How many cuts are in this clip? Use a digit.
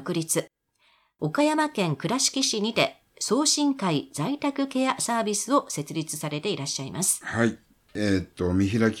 0